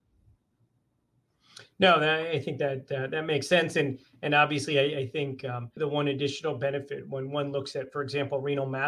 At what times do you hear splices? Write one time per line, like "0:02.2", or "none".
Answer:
0:05.8